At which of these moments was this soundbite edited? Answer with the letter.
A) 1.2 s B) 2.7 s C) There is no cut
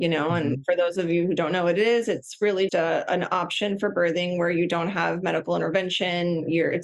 B